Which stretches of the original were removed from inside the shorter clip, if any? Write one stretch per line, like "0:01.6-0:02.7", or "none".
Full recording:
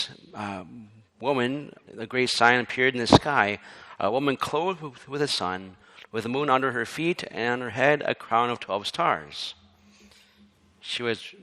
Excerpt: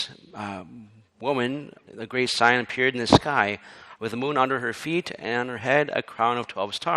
0:04.0-0:06.1